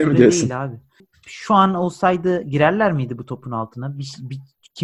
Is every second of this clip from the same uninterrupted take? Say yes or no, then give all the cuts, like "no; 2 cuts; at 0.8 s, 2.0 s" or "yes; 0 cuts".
yes; 0 cuts